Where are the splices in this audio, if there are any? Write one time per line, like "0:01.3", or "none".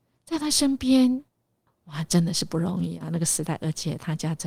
0:01.7